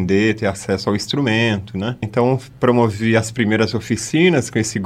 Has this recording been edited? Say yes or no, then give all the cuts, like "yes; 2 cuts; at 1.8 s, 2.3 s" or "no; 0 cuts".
yes; 1 cut; at 2.0 s